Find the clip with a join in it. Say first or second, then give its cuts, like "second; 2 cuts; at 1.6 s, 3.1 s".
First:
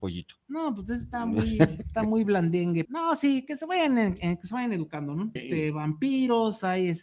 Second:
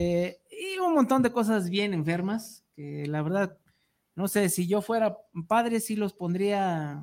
first; 2 cuts; at 2.8 s, 5.4 s